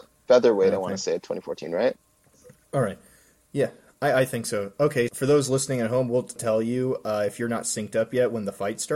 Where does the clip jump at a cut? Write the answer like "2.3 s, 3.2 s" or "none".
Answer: 5.1 s, 6.4 s